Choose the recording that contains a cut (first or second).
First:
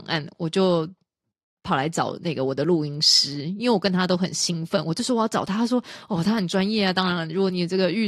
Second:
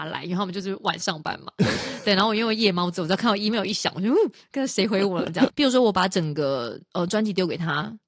second